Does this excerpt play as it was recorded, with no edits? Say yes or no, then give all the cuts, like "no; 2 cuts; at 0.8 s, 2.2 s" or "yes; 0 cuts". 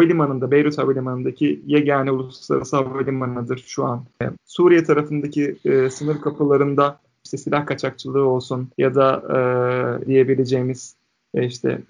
no; 3 cuts; at 4.4 s, 8.7 s, 10.0 s